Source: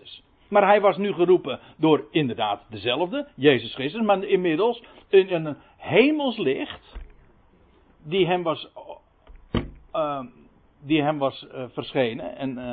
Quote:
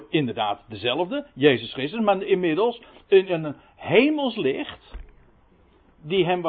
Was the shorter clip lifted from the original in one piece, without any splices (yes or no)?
yes